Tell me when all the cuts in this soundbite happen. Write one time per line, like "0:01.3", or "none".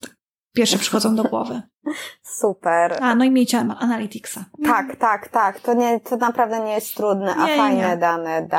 none